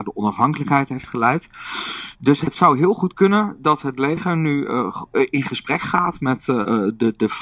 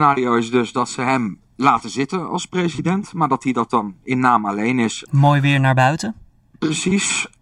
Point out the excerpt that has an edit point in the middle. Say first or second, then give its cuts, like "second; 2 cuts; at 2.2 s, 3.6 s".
second; 1 cut; at 5.1 s